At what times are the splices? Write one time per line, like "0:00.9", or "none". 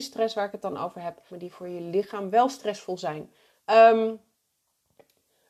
0:01.3
0:03.6